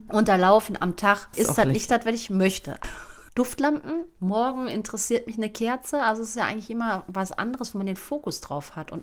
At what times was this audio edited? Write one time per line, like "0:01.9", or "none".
0:01.3
0:02.8